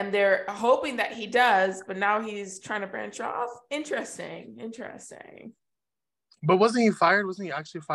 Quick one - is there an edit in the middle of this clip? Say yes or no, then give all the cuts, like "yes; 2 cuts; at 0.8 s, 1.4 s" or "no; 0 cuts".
no; 0 cuts